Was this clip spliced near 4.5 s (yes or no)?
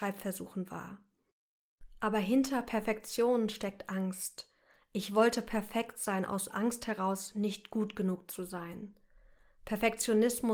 no